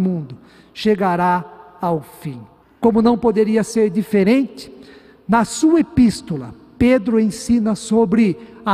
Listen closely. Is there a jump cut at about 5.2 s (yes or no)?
no